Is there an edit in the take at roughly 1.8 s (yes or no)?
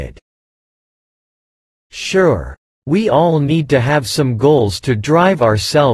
yes